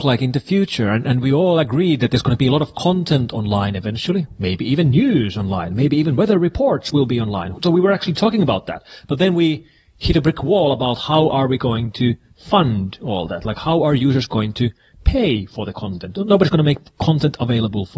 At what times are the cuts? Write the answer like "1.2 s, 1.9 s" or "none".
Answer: 7.5 s